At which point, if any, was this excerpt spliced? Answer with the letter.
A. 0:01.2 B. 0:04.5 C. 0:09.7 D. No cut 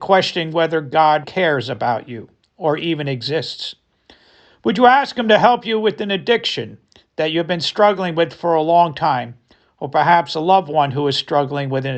A